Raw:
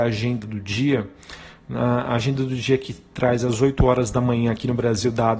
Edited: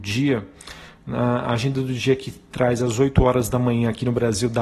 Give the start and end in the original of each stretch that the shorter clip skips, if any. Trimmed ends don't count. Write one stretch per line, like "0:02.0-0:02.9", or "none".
none